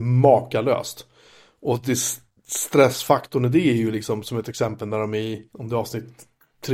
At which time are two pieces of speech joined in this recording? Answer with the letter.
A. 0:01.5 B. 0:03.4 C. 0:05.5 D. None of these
C